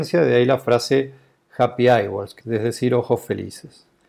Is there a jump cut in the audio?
yes; 1 cut; at 2.4 s

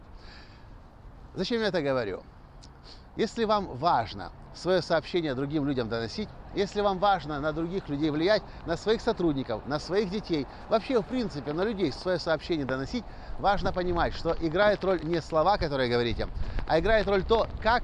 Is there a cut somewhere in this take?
yes; 1 cut; at 12.0 s

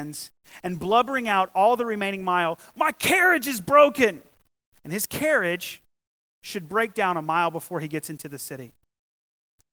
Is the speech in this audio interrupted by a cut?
yes; 1 cut; at 4.8 s

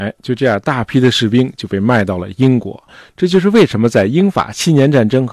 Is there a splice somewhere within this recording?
no; 0 cuts

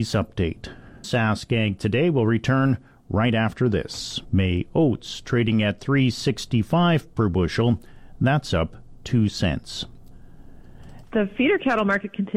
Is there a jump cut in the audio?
yes; 3 cuts; at 1.0 s, 4.3 s, 11.0 s

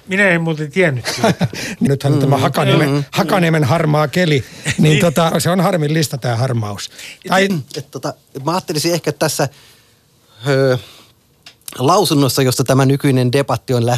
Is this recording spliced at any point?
yes; 3 cuts; at 1.9 s, 5.3 s, 7.5 s

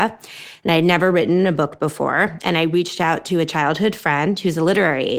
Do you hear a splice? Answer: no; 0 cuts

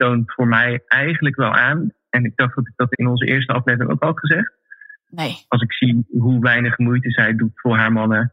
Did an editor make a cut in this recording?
yes; 2 cuts; at 2.9 s, 5.0 s

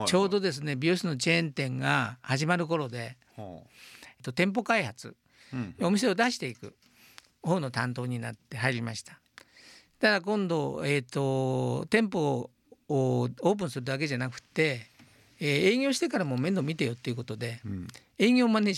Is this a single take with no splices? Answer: yes; 0 cuts

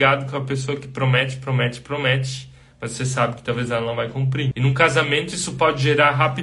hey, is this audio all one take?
no; 1 cut; at 4.5 s

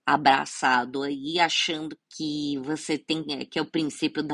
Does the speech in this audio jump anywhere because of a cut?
yes; 1 cut; at 2.0 s

